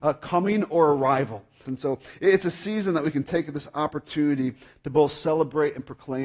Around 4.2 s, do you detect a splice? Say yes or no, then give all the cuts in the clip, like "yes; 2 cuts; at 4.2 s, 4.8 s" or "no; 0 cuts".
no; 1 cut; at 1.6 s